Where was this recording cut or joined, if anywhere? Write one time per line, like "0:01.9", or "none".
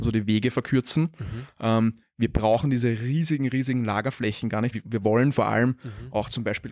0:04.7